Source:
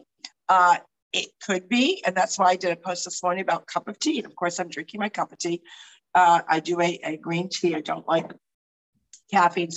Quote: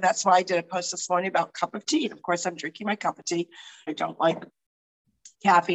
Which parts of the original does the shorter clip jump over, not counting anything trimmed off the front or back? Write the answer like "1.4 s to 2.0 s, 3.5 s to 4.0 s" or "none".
6.0 s to 7.7 s